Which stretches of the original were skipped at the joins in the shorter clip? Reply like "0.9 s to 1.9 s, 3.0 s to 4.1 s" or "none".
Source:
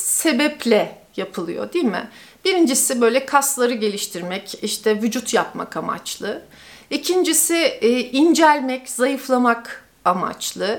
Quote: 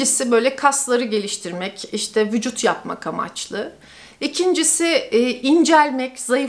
none